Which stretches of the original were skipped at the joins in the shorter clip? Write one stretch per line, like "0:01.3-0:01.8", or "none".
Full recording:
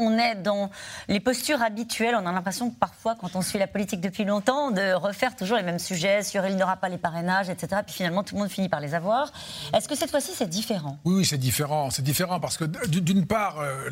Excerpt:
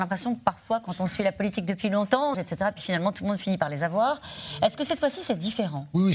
0:04.7-0:07.5